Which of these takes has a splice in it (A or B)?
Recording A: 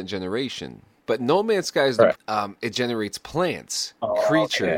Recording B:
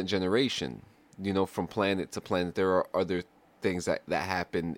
A